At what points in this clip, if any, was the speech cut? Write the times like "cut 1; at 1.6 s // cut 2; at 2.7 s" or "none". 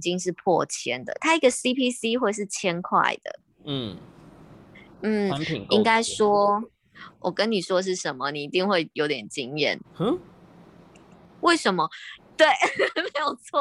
cut 1; at 3.5 s // cut 2; at 9.8 s // cut 3; at 12.2 s